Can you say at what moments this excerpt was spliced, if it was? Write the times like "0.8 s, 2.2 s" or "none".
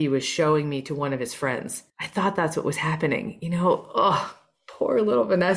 1.9 s